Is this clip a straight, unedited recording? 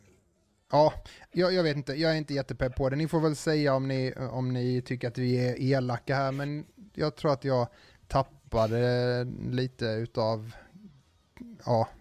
no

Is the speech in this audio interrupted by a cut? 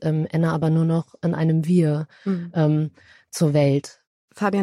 no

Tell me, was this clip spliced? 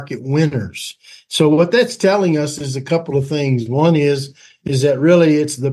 no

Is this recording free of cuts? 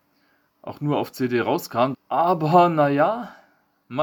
no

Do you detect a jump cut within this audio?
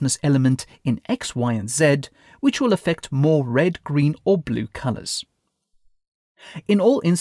no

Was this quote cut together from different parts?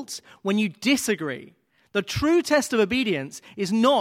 no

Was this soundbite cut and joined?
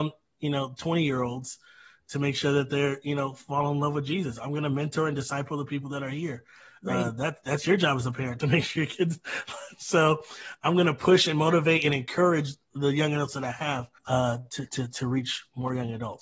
yes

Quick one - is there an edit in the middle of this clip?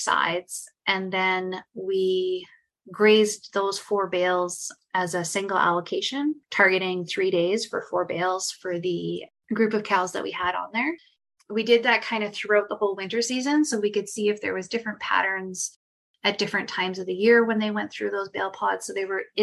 no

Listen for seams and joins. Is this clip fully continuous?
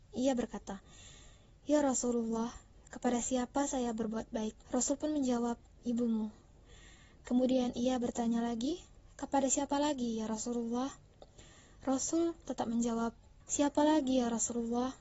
no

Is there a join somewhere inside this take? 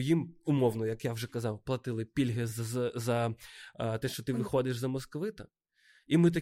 no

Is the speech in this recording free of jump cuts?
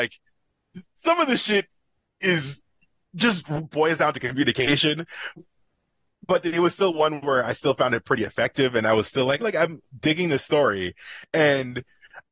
no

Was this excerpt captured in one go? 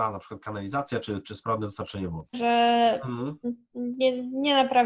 no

